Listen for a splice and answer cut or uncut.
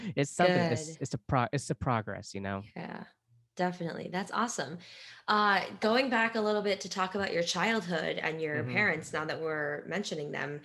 uncut